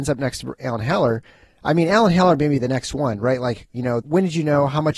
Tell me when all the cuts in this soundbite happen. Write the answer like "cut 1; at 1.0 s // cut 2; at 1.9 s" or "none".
cut 1; at 4.0 s